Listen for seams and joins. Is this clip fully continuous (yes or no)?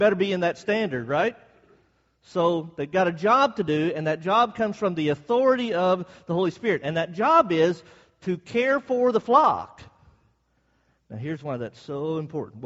yes